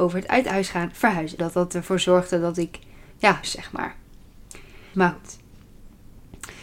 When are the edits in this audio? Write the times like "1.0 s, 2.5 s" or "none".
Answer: 1.4 s, 3.4 s, 4.9 s